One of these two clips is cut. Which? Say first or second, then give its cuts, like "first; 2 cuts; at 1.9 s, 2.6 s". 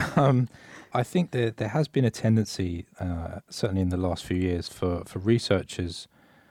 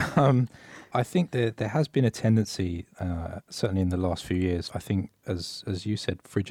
second; 1 cut; at 4.7 s